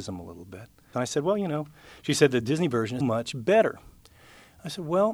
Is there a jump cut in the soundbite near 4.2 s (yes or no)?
no